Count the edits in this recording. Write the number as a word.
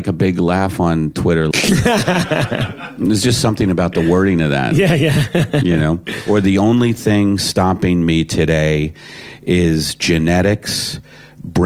one